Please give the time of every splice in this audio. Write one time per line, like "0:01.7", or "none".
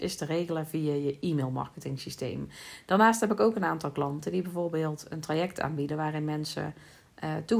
none